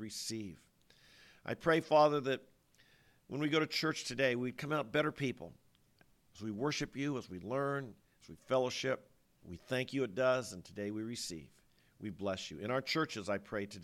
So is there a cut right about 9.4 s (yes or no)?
yes